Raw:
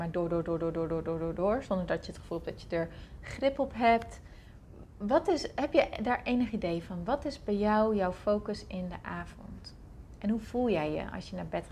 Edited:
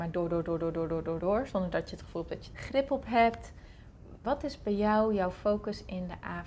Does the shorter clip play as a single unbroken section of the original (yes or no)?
no